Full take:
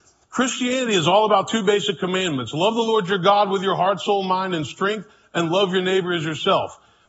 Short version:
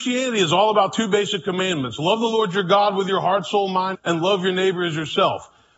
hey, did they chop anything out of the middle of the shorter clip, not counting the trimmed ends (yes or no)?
yes